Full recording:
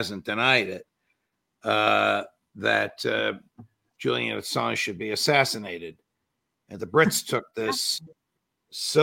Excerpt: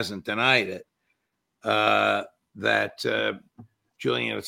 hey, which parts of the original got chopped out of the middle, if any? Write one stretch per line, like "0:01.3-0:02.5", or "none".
none